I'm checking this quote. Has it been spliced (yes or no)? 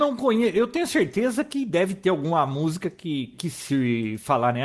yes